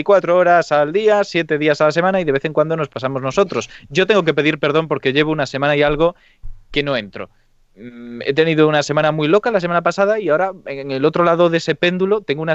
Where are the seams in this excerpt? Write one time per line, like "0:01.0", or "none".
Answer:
none